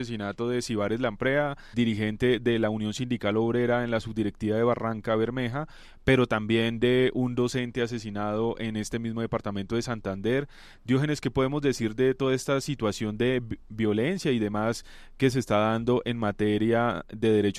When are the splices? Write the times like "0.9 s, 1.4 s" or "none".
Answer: 1.7 s